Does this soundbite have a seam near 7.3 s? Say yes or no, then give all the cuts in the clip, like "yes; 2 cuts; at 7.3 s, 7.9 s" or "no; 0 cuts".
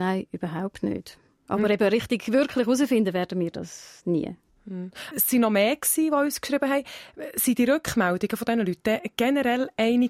no; 1 cut; at 5.1 s